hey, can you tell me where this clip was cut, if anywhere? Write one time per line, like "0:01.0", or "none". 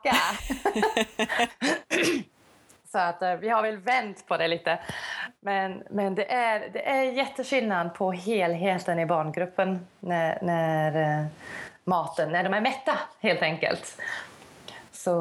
none